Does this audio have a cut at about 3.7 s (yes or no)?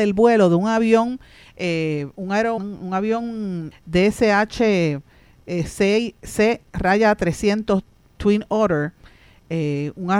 yes